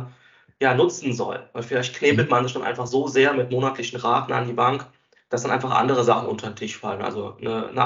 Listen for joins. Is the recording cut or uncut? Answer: uncut